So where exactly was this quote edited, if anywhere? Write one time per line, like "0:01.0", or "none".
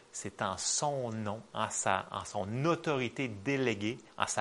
none